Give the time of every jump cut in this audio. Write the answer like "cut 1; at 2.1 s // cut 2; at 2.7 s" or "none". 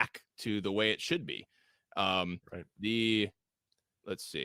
none